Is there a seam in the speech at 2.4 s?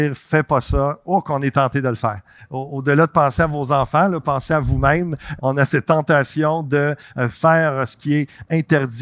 yes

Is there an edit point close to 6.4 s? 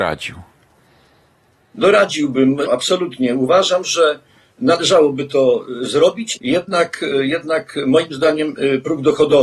yes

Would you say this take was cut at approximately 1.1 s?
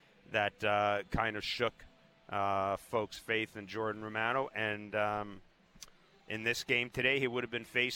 no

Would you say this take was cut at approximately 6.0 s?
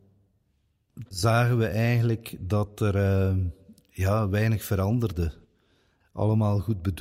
yes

